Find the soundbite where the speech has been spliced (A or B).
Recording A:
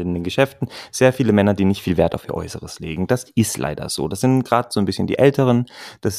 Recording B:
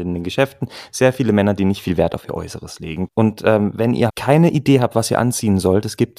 B